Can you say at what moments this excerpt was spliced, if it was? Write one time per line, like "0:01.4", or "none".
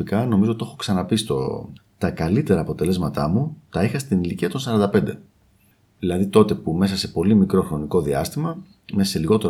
0:01.8